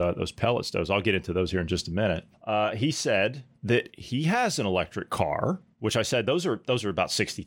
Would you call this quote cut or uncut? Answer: uncut